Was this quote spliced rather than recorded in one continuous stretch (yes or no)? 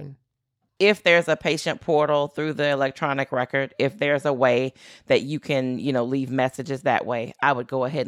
no